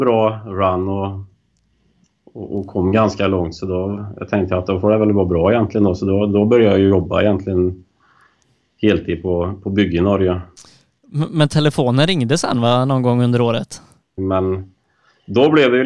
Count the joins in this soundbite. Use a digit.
1